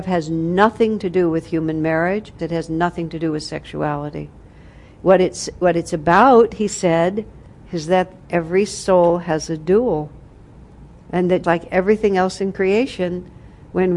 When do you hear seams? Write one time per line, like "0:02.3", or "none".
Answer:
0:02.4
0:11.4